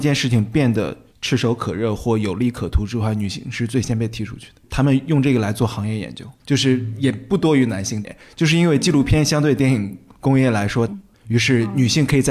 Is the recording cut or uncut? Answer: cut